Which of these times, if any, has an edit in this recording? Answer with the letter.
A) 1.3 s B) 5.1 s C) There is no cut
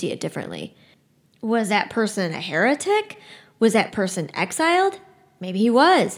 C